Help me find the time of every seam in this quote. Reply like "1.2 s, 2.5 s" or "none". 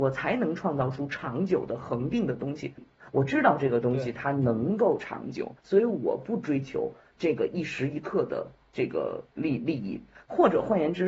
2.8 s, 5.6 s